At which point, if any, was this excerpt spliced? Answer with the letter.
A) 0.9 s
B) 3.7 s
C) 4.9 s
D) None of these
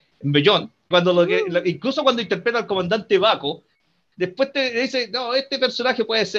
A